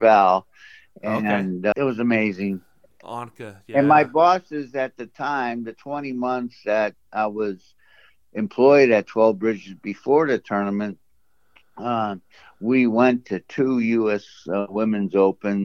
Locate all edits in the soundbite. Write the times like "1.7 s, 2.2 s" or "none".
1.7 s

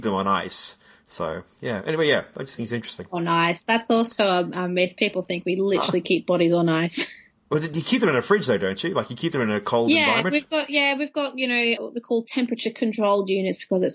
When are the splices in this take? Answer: none

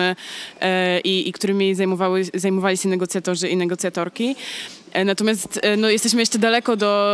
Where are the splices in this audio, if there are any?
none

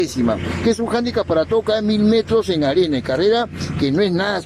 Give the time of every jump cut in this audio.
none

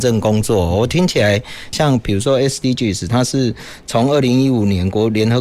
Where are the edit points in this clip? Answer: 1.7 s

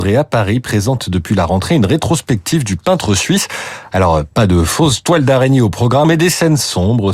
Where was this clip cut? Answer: 6.0 s

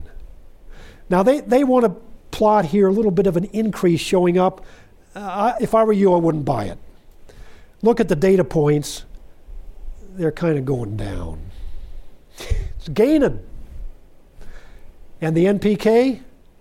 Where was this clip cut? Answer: 12.3 s

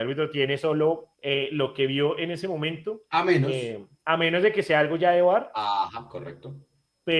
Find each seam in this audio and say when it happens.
1.1 s

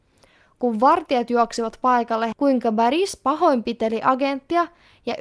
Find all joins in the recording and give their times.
2.3 s

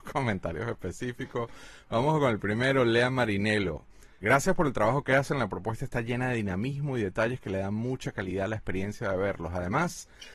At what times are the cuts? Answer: 4.2 s

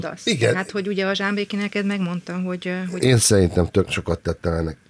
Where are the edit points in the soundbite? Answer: 3.0 s

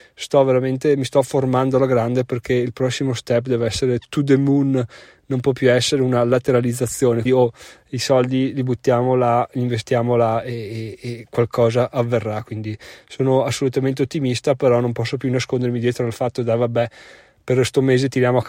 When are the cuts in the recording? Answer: 7.3 s

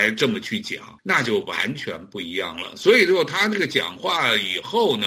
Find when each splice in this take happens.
1.0 s

